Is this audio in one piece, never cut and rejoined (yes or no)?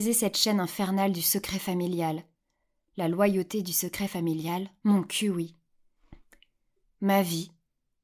yes